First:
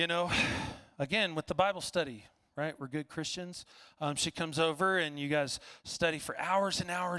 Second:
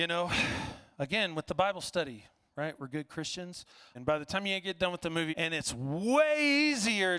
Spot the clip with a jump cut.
second; 2 cuts; at 3.9 s, 5.3 s

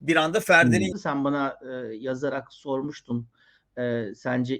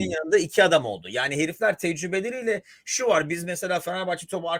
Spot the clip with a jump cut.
first; 1 cut; at 0.9 s

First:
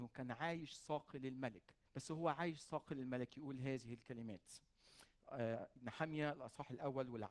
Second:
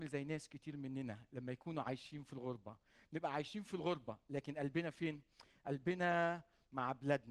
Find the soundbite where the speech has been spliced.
first; 1 cut; at 1.8 s

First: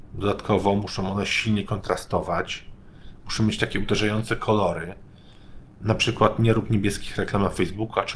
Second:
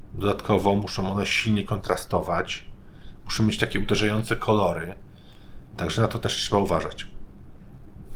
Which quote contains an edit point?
second; 1 cut; at 5.7 s

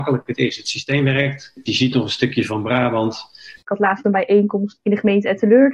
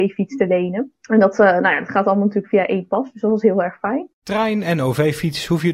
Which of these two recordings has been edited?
first; 2 cuts; at 1.7 s, 3.6 s

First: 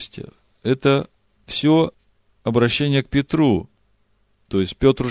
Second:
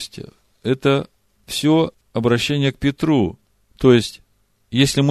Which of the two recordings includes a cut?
second; 2 cuts; at 2.0 s, 3.7 s

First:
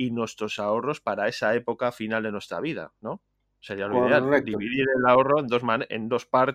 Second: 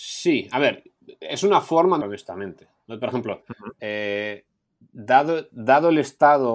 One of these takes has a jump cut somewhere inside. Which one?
second; 2 cuts; at 2.0 s, 3.8 s

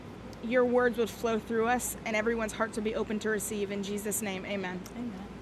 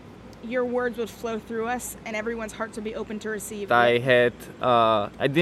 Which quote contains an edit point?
second; 1 cut; at 3.7 s

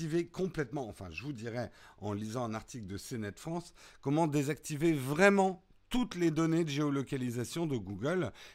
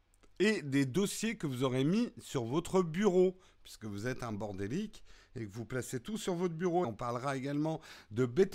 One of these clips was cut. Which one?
second; 1 cut; at 6.8 s

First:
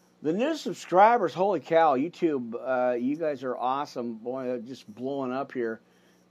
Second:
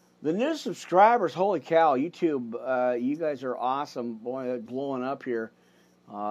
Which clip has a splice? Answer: second; 1 cut; at 4.7 s

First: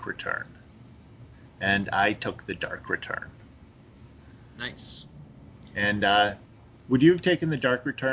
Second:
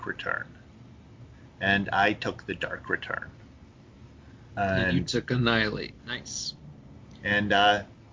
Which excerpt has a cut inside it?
second; 2 cuts; at 4.5 s, 6.0 s

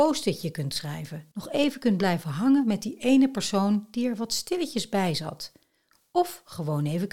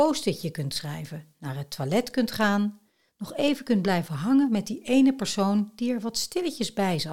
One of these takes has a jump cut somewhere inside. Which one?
first; 1 cut; at 1.3 s

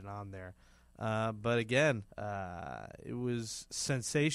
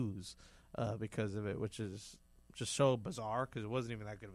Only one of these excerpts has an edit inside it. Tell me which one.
first; 1 cut; at 2.1 s

